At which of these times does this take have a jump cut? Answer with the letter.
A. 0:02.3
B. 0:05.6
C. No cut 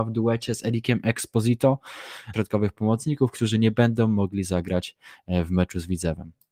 A